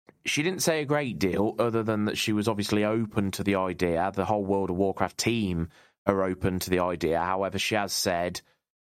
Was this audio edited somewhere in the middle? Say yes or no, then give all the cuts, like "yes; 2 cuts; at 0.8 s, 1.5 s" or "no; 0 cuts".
no; 0 cuts